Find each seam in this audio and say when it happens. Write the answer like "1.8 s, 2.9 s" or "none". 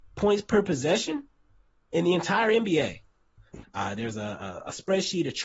3.6 s